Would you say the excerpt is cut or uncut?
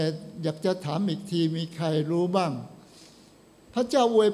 uncut